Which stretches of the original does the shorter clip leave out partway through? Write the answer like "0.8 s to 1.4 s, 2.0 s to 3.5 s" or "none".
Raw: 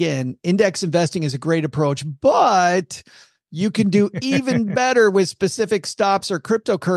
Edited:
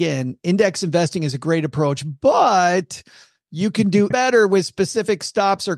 4.1 s to 4.7 s